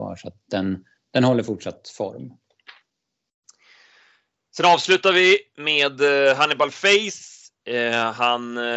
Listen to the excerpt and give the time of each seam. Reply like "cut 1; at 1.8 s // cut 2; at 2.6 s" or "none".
cut 1; at 7.6 s